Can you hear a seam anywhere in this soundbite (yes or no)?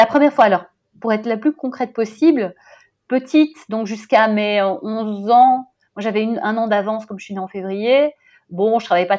no